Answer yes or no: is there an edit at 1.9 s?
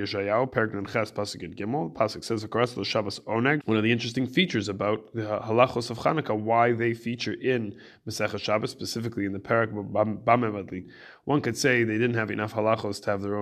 no